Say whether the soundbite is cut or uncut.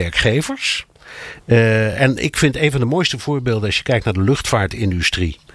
uncut